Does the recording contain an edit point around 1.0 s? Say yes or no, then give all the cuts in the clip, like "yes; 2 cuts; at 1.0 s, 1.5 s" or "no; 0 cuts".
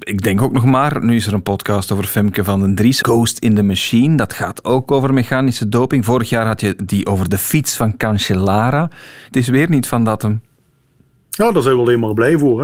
no; 2 cuts; at 3.0 s, 9.3 s